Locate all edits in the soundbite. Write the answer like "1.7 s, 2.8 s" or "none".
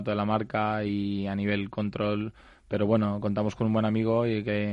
none